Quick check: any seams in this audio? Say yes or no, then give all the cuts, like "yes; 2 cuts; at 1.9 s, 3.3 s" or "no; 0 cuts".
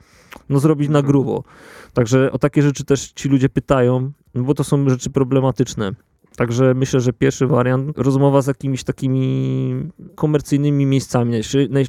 yes; 2 cuts; at 7.9 s, 10.1 s